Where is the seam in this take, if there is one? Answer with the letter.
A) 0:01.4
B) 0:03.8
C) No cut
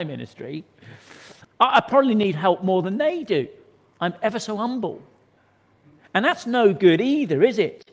A